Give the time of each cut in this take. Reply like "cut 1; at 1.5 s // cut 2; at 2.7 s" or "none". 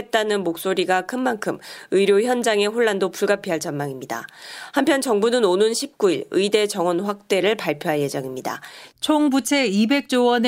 cut 1; at 8.9 s